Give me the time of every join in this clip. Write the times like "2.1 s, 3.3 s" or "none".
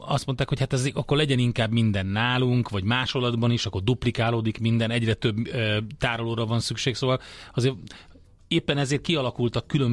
none